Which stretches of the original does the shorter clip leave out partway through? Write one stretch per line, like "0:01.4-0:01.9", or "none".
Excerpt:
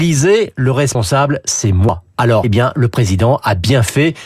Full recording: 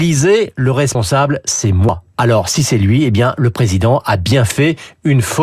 0:02.4-0:03.1